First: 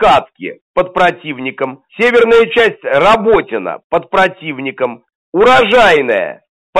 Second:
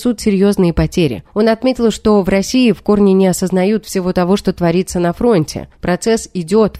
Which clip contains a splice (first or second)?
first